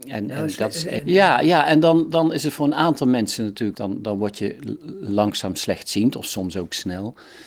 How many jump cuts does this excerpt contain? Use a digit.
2